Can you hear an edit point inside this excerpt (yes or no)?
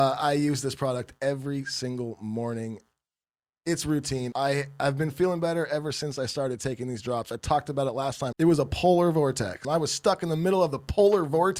yes